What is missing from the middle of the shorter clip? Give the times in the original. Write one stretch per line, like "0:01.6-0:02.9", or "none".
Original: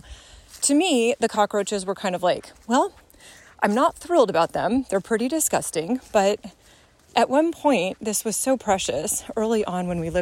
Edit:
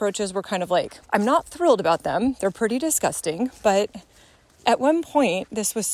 0:02.6-0:03.5